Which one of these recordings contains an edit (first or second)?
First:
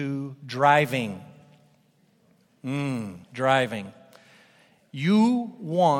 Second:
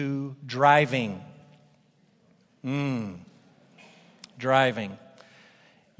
first